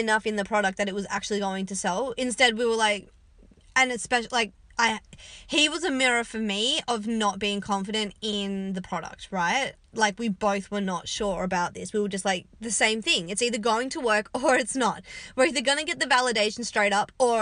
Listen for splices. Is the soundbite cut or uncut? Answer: uncut